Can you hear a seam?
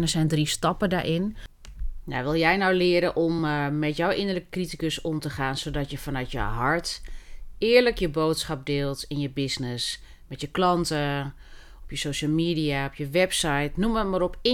no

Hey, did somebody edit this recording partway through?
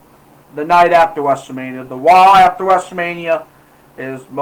no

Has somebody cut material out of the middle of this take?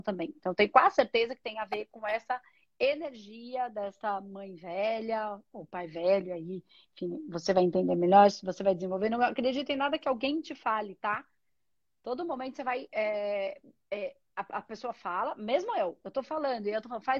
no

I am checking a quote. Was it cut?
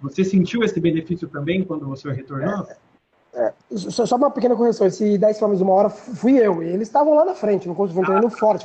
no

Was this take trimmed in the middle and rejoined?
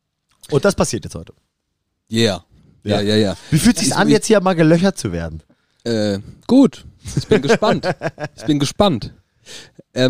no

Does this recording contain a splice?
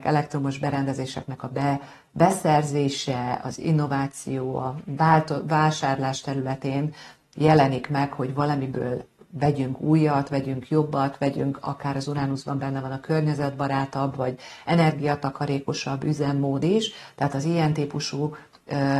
no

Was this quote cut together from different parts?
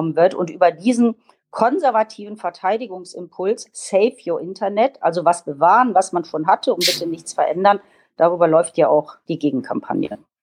no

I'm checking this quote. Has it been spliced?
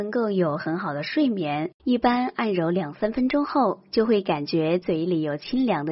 yes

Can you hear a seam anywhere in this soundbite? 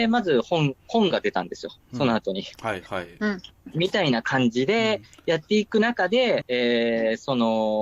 yes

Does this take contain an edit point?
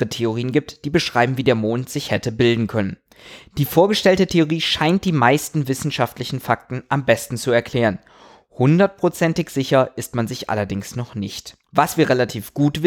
yes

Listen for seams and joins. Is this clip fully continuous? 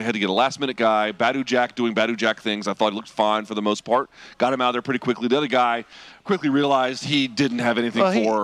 no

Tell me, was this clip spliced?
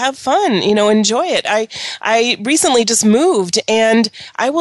no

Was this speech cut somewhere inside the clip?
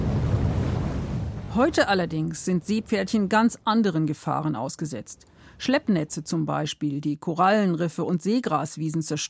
no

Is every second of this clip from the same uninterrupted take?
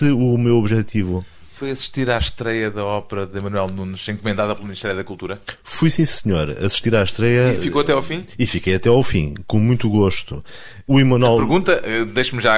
yes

